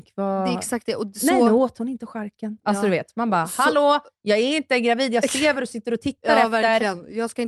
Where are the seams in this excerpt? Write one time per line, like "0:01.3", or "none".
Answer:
none

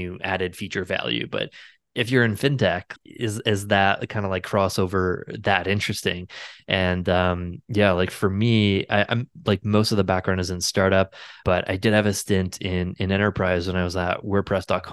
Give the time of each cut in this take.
0:03.0
0:11.4

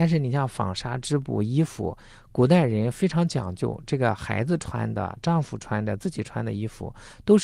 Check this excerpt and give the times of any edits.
none

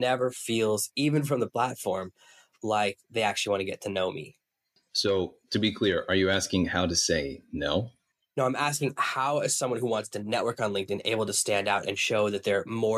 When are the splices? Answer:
none

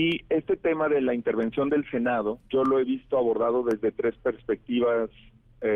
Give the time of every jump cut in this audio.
0:02.4

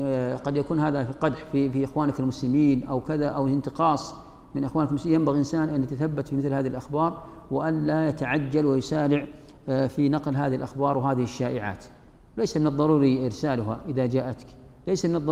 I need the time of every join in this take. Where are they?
none

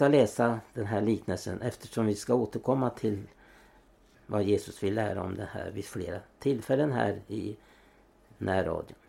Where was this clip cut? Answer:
0:04.1

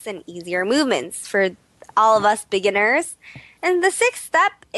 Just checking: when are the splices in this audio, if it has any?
none

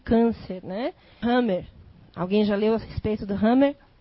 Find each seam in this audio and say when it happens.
0:01.2

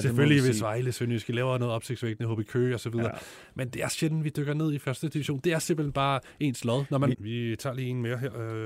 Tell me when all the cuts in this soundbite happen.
0:07.1

